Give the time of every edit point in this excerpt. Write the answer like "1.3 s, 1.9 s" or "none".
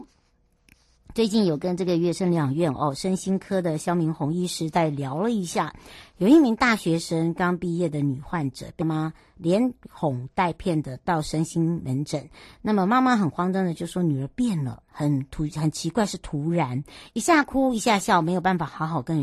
8.8 s